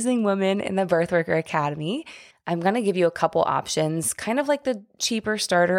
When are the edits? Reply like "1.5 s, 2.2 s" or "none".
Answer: 2.3 s